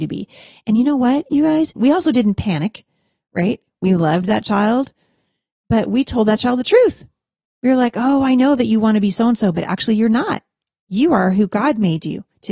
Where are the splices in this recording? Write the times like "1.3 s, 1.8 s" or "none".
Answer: 1.8 s